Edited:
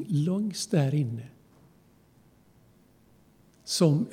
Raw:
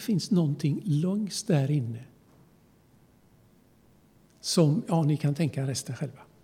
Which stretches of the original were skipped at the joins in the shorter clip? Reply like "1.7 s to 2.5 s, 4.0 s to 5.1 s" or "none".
none